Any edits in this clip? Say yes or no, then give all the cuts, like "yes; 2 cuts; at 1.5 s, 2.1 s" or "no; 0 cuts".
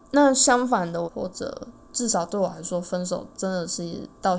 yes; 1 cut; at 1.1 s